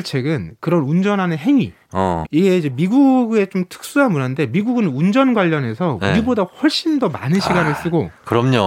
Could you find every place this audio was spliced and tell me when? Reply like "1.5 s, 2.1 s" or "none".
2.2 s